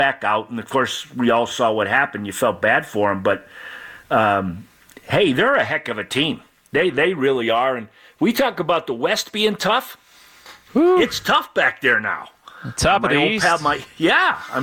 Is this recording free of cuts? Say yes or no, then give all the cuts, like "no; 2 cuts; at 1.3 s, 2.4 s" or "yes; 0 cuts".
yes; 0 cuts